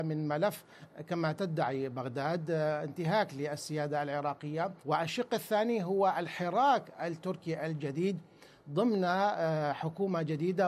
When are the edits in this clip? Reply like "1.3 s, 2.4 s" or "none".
4.8 s